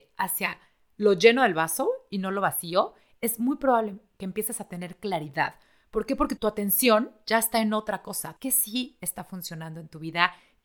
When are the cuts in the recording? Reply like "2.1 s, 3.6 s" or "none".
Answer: 6.4 s, 8.4 s